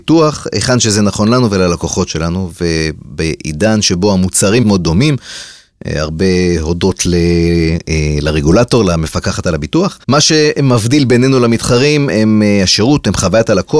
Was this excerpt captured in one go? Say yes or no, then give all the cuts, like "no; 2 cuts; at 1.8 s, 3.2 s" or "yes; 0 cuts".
no; 2 cuts; at 4.6 s, 10.0 s